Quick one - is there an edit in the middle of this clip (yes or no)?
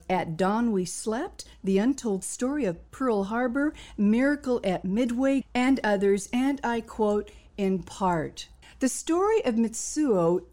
yes